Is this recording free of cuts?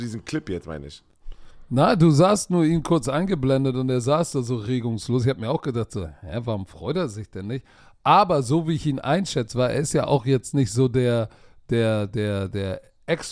yes; 0 cuts

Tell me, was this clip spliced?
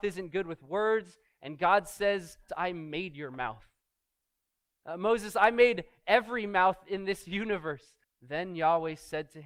yes; 2 cuts; at 2.5 s, 8.0 s

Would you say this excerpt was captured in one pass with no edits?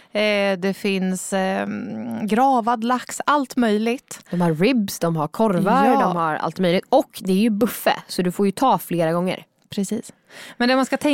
yes; 0 cuts

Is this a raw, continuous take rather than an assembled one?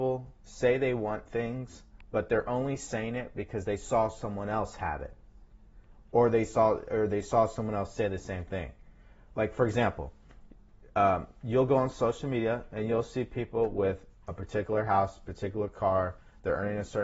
yes; 0 cuts

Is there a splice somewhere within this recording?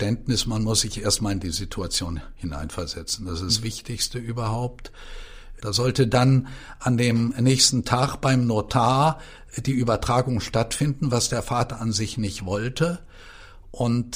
yes; 1 cut; at 5.6 s

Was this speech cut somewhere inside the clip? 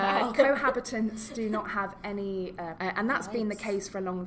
yes; 1 cut; at 2.8 s

